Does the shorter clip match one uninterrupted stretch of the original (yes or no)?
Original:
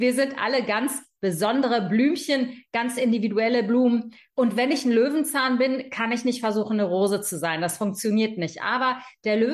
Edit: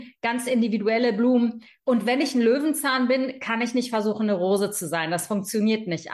yes